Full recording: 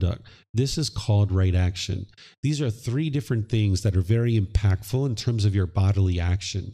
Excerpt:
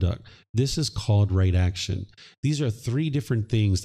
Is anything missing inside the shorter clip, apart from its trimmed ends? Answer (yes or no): no